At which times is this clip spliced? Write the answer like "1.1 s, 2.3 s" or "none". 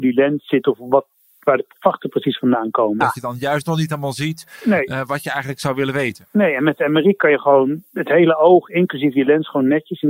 3.0 s